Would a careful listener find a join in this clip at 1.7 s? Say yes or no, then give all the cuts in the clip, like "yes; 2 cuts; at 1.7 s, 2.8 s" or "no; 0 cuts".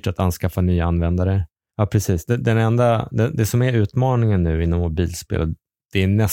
yes; 1 cut; at 1.7 s